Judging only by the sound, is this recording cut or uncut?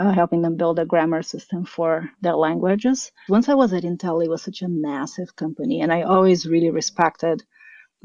cut